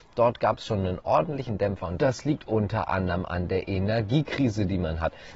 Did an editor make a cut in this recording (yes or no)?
no